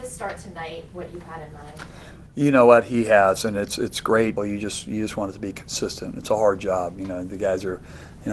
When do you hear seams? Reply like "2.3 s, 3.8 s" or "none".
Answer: 4.4 s